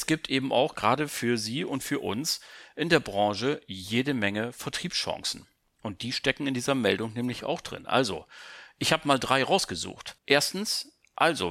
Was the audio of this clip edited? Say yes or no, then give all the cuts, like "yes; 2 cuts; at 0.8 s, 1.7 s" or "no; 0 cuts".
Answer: yes; 1 cut; at 10.2 s